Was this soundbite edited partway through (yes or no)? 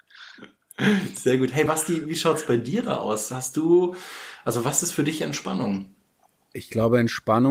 no